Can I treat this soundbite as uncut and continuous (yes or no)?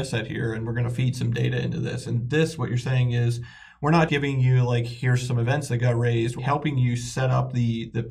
no